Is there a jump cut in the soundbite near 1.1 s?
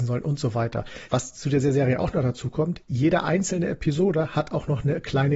yes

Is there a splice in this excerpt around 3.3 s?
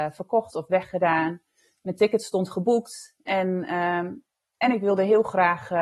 yes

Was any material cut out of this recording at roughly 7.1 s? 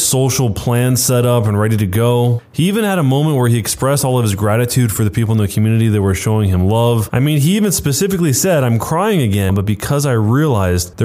no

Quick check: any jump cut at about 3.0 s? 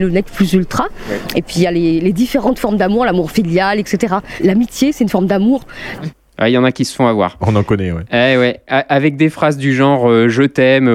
no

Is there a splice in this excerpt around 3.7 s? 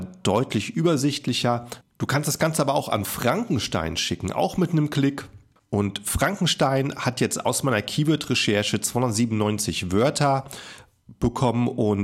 no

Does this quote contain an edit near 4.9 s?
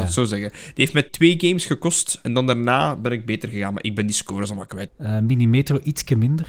yes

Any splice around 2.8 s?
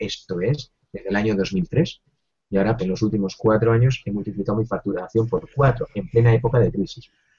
yes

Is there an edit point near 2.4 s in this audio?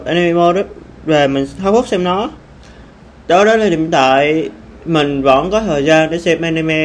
no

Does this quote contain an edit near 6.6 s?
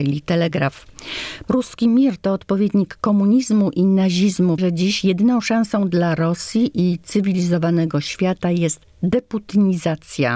no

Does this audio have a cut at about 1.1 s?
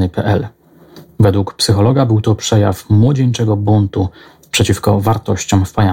no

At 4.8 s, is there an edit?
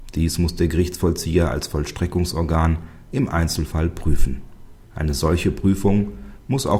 yes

